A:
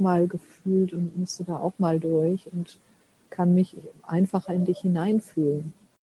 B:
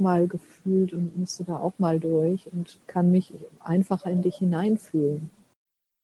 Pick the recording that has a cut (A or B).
B